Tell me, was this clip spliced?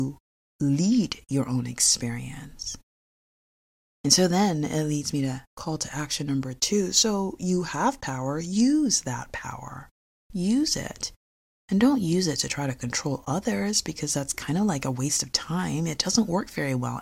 no; 0 cuts

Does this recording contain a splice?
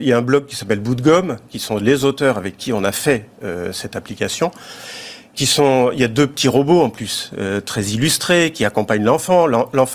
no; 0 cuts

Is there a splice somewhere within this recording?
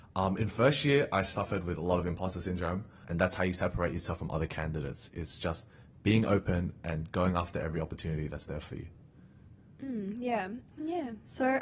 yes; 2 cuts; at 3.0 s, 10.7 s

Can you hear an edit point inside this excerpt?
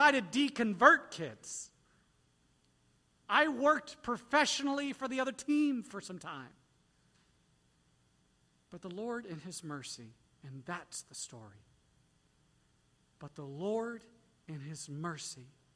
no; 0 cuts

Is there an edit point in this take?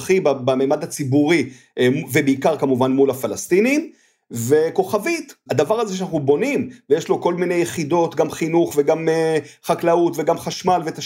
yes; 1 cut; at 5.5 s

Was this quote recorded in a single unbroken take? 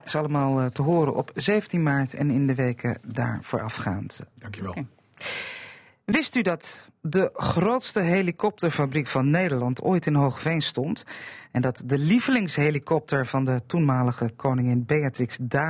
no; 1 cut; at 4.3 s

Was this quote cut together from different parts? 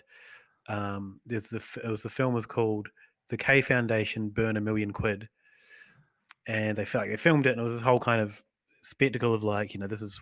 no; 0 cuts

